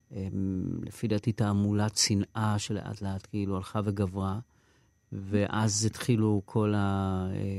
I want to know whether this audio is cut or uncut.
uncut